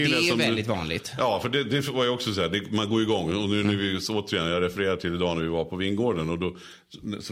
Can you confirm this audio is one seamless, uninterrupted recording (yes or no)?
yes